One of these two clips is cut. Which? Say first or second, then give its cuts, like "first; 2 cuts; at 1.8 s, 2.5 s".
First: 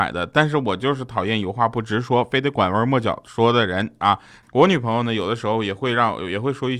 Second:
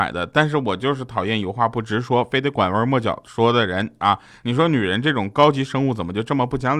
first; 1 cut; at 4.4 s